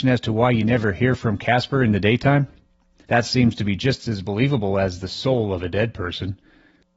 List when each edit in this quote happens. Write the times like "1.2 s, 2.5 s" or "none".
3.0 s